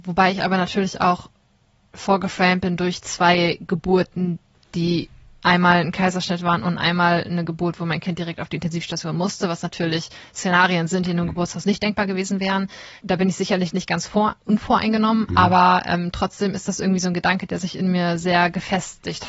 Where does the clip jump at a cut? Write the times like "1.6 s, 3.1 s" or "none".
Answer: 13.0 s